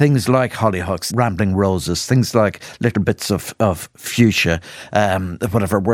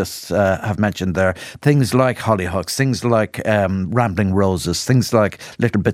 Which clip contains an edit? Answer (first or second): first